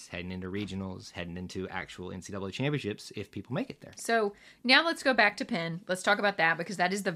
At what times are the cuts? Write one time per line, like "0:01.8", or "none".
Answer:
0:04.0